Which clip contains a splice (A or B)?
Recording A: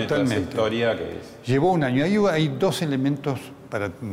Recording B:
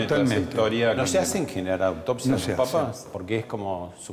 B